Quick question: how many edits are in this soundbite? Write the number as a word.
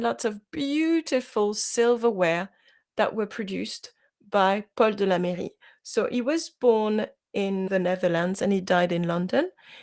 one